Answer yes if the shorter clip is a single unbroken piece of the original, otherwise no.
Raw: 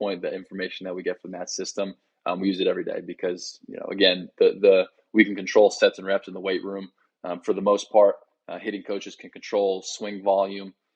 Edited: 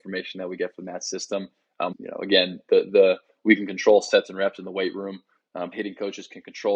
no